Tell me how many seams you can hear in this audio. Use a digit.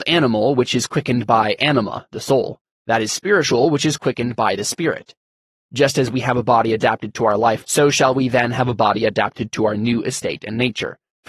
1